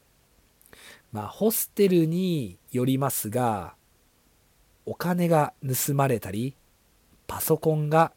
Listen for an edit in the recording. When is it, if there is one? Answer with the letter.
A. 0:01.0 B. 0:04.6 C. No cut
A